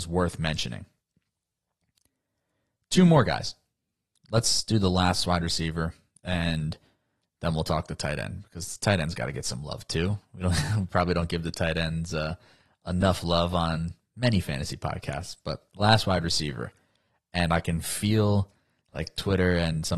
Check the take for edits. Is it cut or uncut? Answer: uncut